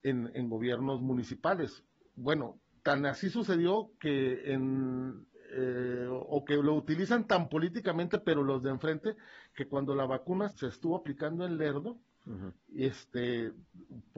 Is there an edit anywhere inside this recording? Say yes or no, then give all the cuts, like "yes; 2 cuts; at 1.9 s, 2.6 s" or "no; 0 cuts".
yes; 1 cut; at 10.5 s